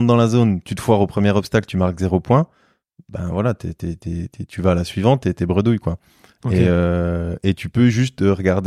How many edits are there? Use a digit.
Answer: 0